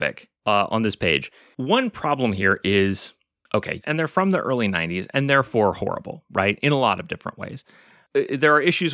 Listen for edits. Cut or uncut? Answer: cut